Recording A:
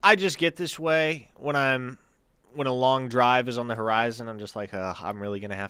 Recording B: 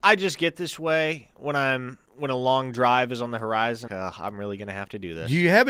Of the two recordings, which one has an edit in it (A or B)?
B